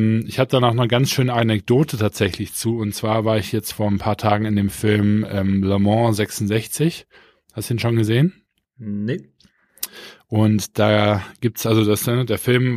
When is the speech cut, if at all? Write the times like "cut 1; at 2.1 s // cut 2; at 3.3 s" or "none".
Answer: none